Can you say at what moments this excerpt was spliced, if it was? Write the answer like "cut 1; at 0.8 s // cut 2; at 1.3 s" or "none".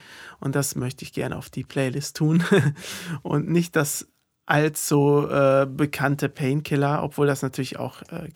none